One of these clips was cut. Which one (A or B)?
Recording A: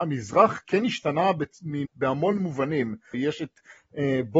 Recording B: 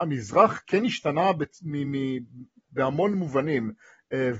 A